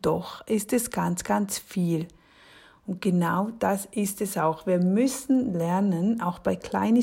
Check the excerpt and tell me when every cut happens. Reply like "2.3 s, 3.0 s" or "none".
none